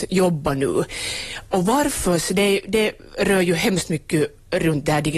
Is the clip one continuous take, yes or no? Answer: yes